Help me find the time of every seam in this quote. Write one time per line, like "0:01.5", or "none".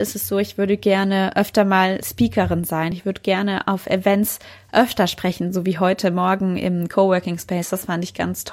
none